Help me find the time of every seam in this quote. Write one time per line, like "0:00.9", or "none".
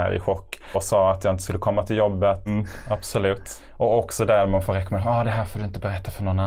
0:02.5